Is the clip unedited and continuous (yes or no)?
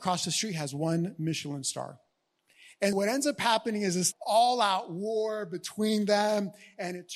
no